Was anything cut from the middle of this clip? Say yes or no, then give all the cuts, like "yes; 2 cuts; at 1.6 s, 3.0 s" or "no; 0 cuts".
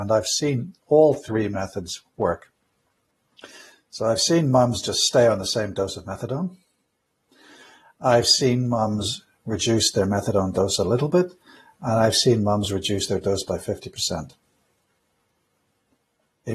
no; 0 cuts